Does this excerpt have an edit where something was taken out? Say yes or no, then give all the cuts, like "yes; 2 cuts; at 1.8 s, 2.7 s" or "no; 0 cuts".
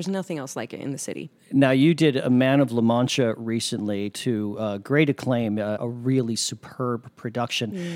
yes; 1 cut; at 5.8 s